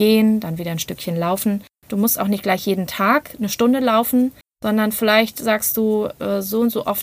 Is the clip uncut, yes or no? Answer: no